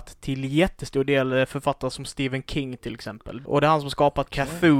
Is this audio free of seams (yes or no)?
no